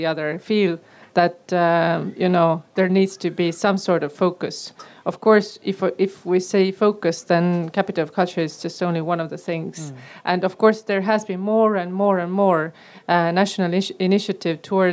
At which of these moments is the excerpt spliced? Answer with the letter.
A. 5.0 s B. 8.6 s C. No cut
C